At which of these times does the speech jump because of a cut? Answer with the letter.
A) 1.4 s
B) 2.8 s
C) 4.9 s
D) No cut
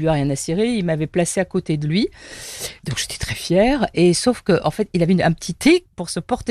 D